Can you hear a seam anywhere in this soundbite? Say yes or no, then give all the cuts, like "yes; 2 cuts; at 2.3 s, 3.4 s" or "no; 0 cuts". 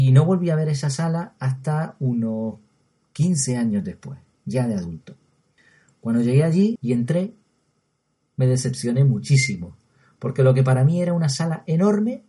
yes; 1 cut; at 6.8 s